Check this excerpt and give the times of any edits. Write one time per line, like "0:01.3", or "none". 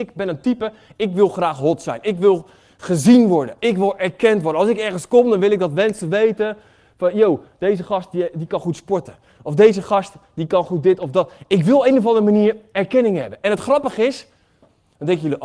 none